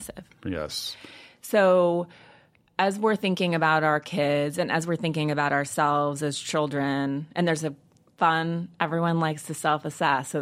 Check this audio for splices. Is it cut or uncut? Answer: uncut